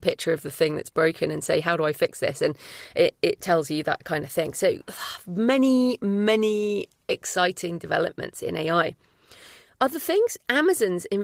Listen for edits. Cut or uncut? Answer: uncut